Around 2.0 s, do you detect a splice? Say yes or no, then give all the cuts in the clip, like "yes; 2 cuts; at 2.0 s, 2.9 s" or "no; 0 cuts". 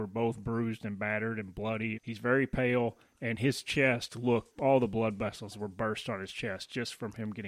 yes; 2 cuts; at 2.0 s, 4.5 s